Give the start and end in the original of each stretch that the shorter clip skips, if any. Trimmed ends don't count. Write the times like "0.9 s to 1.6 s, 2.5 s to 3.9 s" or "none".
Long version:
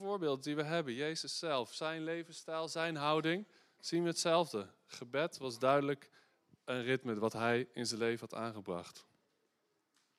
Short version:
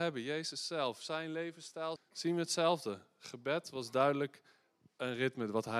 2.7 s to 3.6 s